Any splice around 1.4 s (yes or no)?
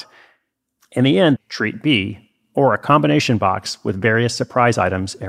yes